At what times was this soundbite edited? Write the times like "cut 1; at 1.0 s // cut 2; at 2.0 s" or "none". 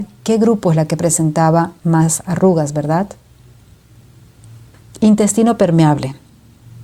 none